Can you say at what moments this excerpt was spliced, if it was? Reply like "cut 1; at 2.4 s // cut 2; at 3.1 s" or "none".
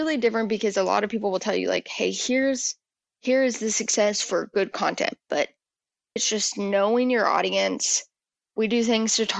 cut 1; at 6.2 s

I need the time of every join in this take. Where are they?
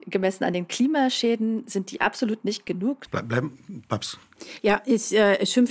cut 1; at 3.1 s

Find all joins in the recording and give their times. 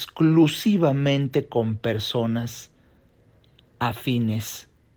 none

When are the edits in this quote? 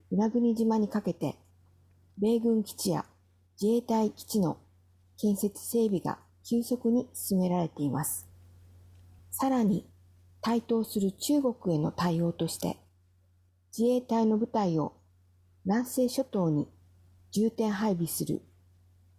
cut 1; at 9.2 s

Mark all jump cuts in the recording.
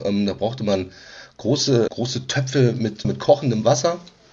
cut 1; at 1.9 s // cut 2; at 3.0 s

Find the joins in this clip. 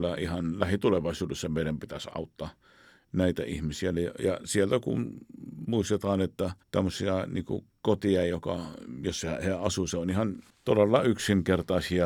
cut 1; at 6.6 s

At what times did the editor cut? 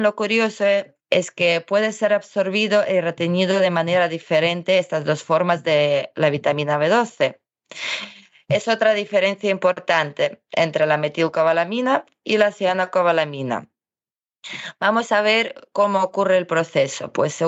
none

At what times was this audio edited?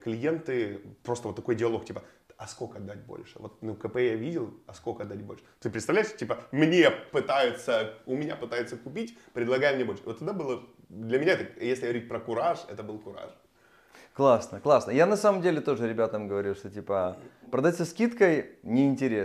none

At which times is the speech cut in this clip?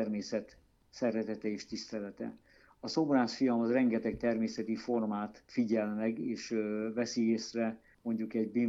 none

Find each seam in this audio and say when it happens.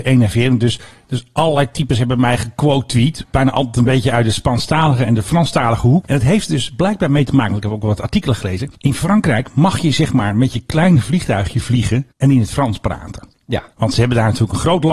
cut 1; at 6.0 s // cut 2; at 13.7 s

